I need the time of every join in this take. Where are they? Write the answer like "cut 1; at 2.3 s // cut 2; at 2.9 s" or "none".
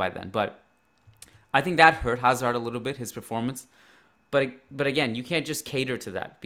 cut 1; at 4.2 s